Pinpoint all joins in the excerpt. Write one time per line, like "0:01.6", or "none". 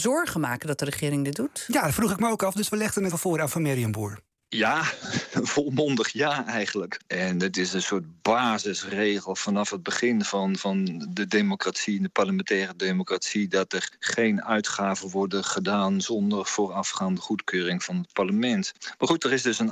0:03.1
0:07.0